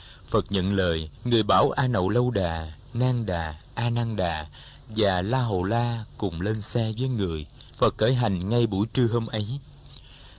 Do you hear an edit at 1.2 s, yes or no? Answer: yes